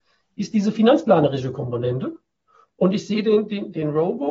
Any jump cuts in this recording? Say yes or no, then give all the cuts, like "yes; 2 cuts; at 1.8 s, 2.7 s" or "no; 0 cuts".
no; 0 cuts